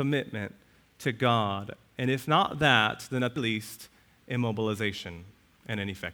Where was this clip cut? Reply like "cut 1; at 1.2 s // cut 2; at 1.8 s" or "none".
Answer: cut 1; at 3.4 s